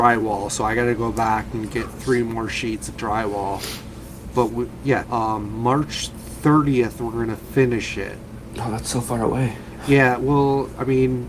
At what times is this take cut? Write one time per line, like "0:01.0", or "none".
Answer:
0:05.0